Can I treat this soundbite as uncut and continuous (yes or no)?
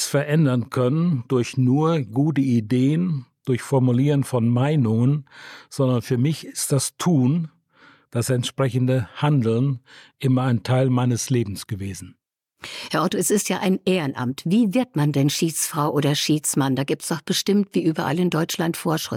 yes